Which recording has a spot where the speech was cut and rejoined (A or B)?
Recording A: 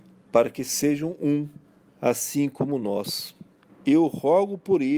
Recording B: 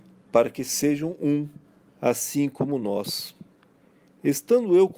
A